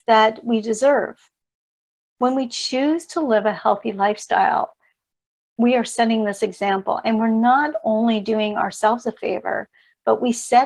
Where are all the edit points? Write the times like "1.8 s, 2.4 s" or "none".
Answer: none